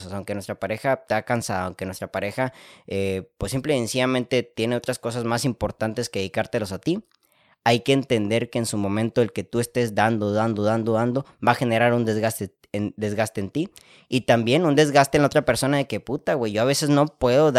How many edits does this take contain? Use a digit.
0